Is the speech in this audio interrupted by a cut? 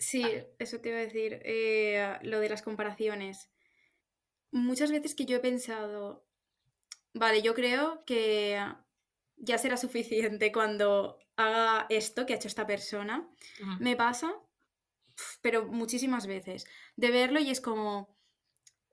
no; 0 cuts

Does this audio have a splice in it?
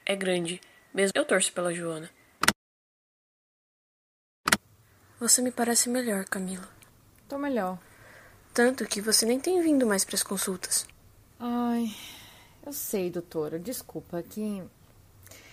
yes; 1 cut; at 1.1 s

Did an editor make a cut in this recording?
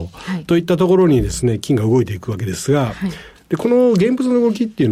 no; 0 cuts

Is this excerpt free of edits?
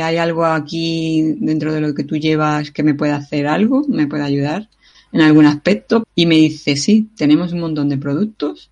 no; 1 cut; at 6.0 s

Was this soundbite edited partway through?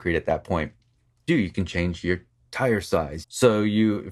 yes; 2 cuts; at 1.3 s, 3.2 s

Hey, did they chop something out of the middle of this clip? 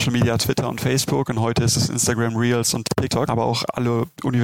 yes; 1 cut; at 3.3 s

